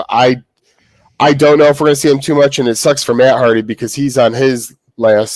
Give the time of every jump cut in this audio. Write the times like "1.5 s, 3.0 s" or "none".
none